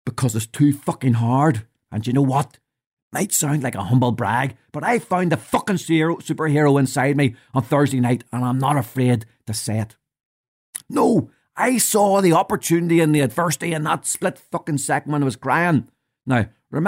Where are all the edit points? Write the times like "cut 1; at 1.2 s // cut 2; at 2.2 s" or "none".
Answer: cut 1; at 1.9 s // cut 2; at 10.8 s